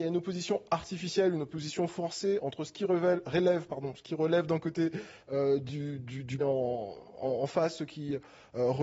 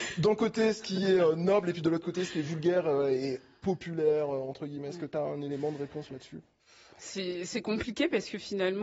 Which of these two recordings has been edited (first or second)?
first